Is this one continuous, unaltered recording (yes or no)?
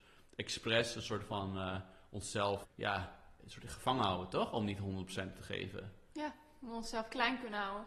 no